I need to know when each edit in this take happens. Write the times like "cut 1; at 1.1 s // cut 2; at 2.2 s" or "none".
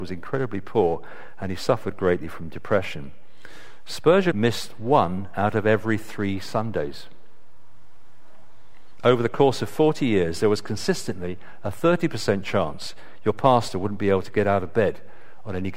cut 1; at 4.3 s // cut 2; at 9.0 s